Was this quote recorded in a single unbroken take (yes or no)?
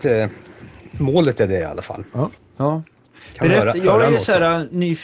yes